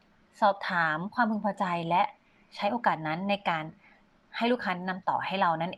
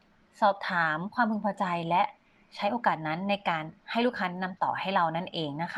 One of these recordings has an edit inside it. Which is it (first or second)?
second